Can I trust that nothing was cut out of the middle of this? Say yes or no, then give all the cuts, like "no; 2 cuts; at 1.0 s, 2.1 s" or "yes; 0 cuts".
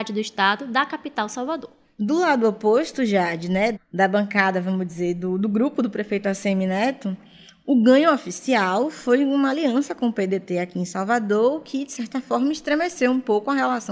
no; 1 cut; at 3.7 s